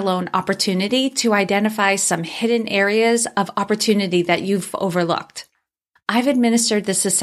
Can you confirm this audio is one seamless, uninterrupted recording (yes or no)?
no